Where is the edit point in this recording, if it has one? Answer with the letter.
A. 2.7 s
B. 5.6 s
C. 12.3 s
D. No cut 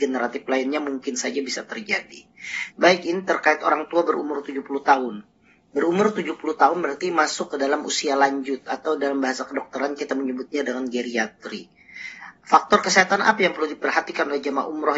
A